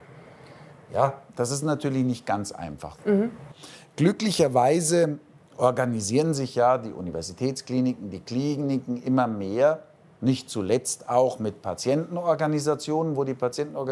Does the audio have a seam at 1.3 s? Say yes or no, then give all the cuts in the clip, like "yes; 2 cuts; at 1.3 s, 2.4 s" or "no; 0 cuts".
yes; 1 cut; at 1.3 s